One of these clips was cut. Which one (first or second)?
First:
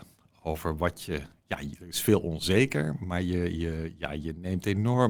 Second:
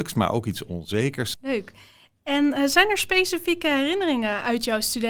second